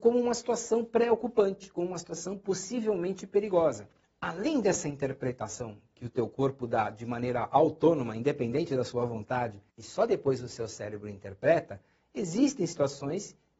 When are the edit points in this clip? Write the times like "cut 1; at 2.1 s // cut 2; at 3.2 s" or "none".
cut 1; at 4.0 s // cut 2; at 9.7 s